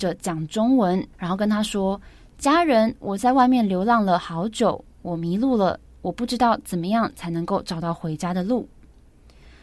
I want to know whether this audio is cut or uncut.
cut